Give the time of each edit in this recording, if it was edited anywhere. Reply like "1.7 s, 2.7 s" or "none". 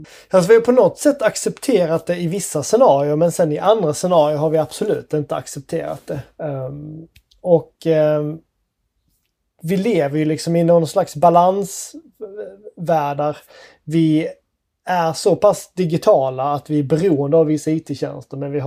13.2 s